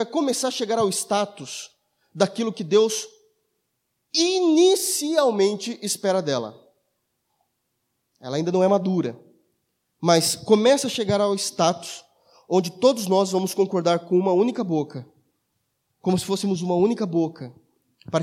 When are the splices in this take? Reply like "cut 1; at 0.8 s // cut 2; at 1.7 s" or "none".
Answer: none